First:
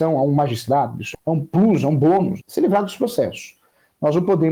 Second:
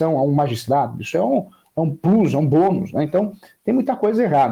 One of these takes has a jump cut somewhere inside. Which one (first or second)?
first